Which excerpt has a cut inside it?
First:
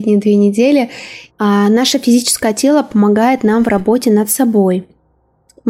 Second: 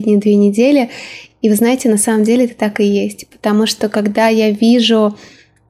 first; 1 cut; at 1.3 s

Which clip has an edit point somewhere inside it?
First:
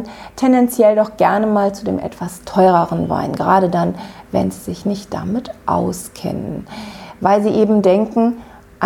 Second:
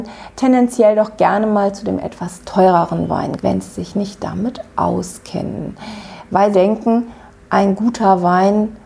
second; 2 cuts; at 3.4 s, 6.5 s

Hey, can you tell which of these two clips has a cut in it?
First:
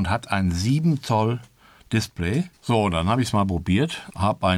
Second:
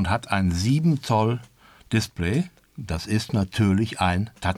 first; 1 cut; at 2.5 s

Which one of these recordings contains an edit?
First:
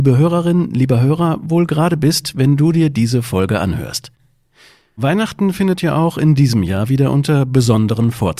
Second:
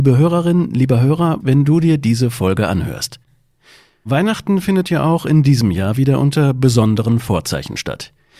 second; 1 cut; at 1.4 s

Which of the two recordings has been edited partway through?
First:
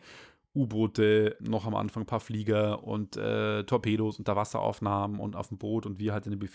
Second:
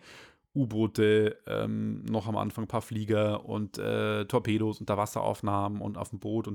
first; 1 cut; at 1.4 s

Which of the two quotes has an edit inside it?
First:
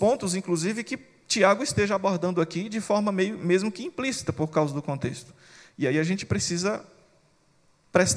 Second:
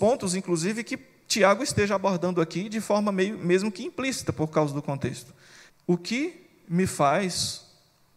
second; 1 cut; at 5.7 s

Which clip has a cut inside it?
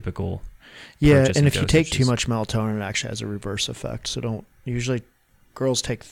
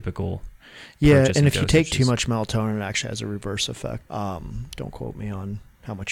second; 1 cut; at 4.0 s

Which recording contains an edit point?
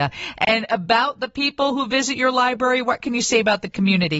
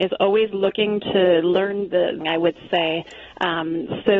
second; 1 cut; at 2.2 s

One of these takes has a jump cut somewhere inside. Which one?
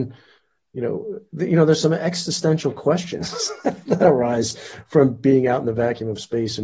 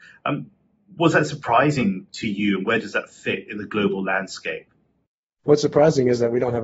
second; 1 cut; at 5.4 s

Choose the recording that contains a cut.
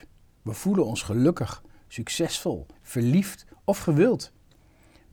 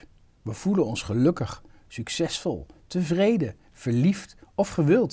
first; 1 cut; at 2.7 s

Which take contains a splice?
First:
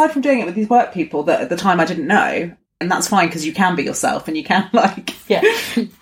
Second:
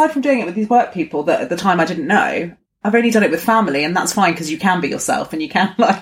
first; 1 cut; at 2.8 s

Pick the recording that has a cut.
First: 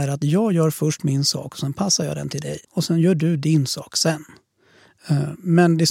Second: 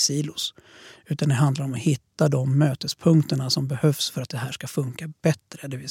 first; 1 cut; at 2.6 s

